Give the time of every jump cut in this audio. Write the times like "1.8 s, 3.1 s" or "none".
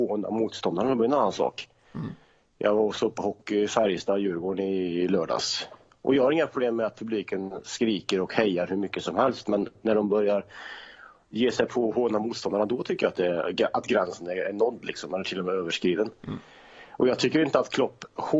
none